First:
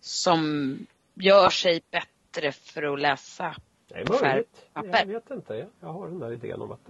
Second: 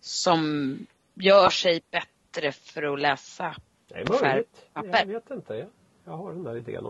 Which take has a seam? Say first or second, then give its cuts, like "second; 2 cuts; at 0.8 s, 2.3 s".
first; 1 cut; at 5.7 s